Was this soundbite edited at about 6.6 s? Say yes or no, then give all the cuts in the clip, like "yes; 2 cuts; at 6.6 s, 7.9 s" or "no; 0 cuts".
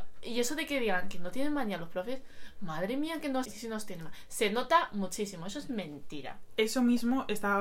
no; 1 cut; at 3.4 s